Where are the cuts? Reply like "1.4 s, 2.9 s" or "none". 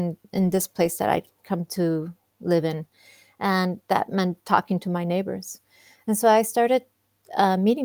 none